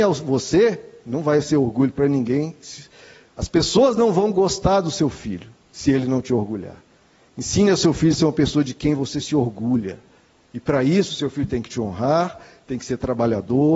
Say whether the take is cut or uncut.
uncut